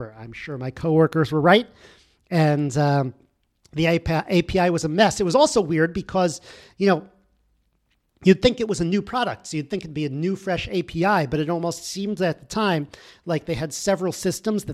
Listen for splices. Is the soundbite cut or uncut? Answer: uncut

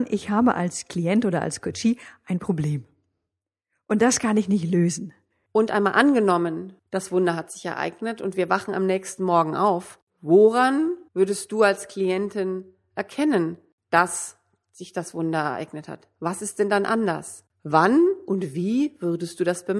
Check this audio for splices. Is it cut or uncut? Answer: cut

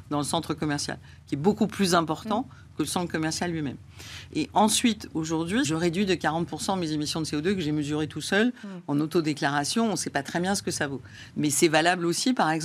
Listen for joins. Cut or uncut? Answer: cut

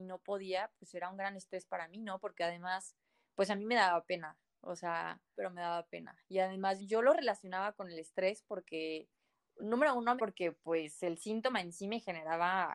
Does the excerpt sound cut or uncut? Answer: cut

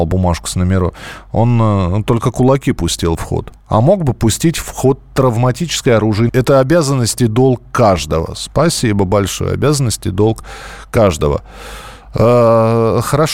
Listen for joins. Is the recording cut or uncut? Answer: cut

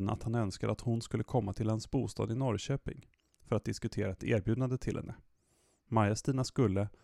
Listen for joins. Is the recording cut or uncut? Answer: uncut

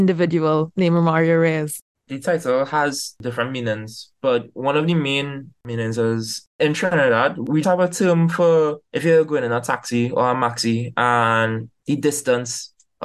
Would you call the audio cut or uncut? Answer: cut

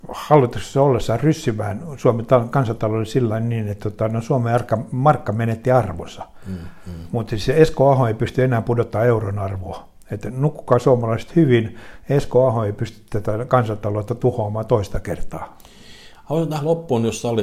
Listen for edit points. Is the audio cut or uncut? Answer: uncut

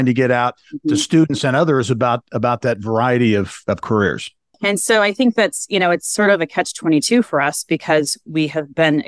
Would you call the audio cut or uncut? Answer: cut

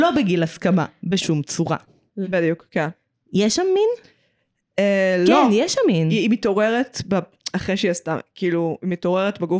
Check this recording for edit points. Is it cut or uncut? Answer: cut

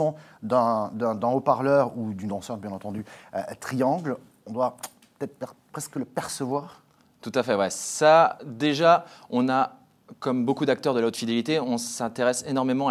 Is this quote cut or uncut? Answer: uncut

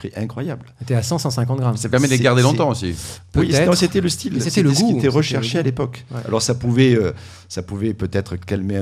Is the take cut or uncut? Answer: uncut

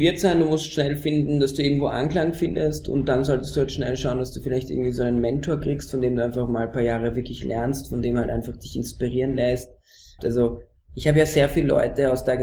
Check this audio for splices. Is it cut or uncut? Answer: cut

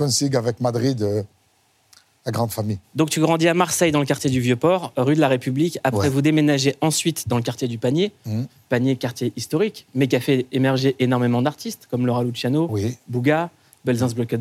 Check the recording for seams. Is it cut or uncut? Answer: uncut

